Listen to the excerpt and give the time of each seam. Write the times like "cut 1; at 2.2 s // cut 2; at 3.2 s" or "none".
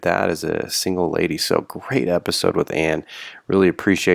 none